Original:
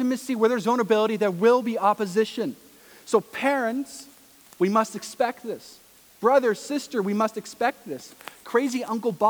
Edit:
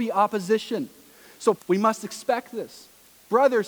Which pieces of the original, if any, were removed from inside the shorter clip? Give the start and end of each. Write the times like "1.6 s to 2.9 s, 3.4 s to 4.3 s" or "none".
3.2 s to 4.5 s